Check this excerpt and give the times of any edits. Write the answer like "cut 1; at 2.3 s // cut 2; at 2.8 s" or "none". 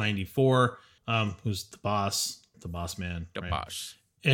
cut 1; at 1.0 s // cut 2; at 2.5 s